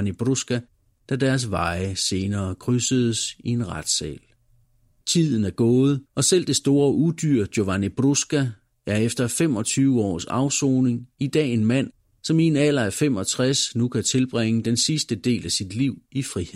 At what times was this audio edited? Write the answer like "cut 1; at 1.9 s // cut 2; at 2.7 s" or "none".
cut 1; at 5.0 s // cut 2; at 6.1 s